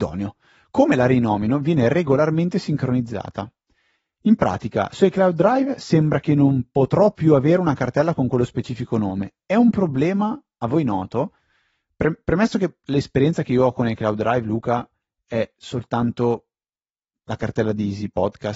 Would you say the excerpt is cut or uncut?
uncut